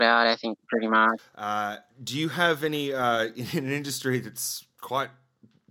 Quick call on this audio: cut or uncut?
cut